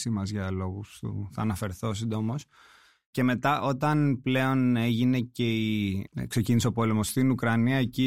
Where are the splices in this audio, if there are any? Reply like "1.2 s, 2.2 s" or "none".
none